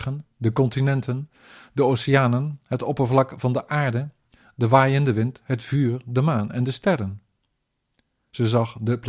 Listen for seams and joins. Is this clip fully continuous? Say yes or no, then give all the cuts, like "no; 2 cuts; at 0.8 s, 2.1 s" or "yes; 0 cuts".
yes; 0 cuts